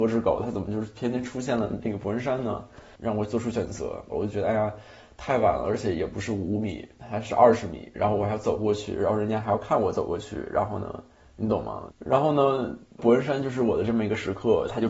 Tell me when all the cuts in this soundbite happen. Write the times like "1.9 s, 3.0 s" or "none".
4.1 s, 11.9 s